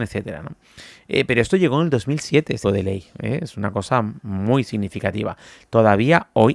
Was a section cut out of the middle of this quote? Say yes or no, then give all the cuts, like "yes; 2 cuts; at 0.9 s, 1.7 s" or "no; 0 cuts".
yes; 1 cut; at 2.6 s